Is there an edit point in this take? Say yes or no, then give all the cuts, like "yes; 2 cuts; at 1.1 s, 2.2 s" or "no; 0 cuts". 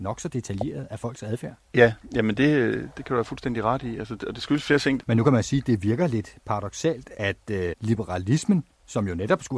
yes; 2 cuts; at 5.0 s, 7.7 s